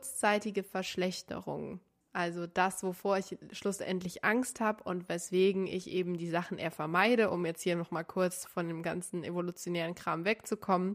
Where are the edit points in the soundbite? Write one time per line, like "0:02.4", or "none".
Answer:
none